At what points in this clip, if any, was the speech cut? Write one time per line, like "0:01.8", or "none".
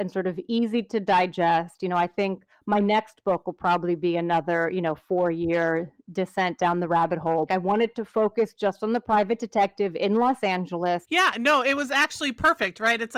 0:07.5
0:11.0